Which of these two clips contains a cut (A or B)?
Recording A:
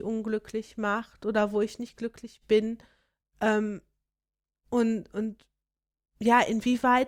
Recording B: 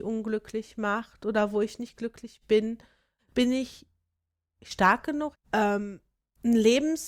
B